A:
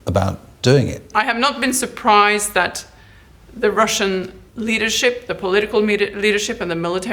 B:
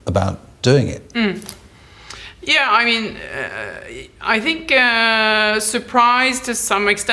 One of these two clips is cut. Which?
A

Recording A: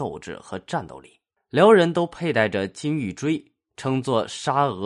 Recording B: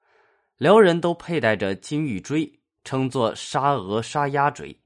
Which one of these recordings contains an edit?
A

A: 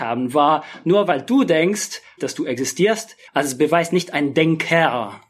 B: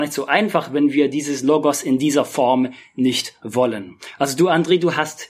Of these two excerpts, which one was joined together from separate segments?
A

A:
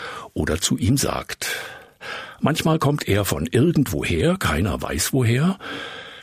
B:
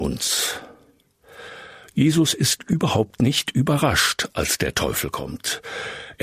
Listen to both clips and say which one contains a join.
A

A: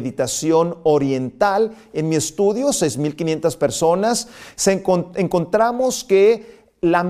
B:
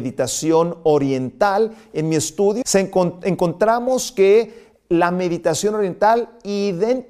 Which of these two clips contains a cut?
B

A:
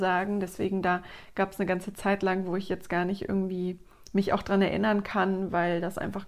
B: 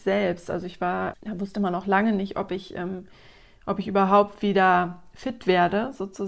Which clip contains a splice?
B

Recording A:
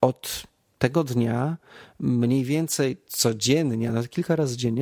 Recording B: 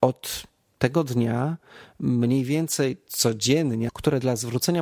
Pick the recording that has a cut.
B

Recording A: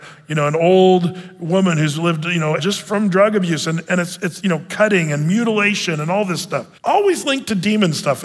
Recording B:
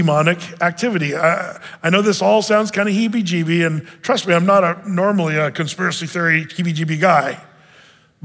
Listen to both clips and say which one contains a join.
A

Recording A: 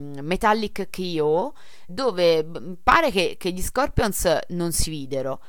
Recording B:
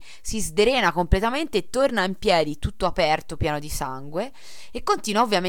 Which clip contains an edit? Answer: A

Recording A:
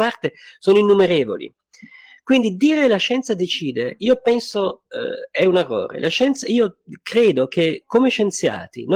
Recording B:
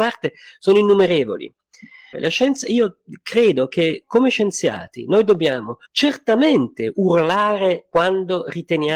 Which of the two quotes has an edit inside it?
B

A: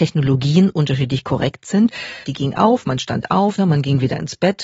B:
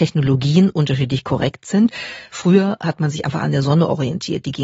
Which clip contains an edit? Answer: A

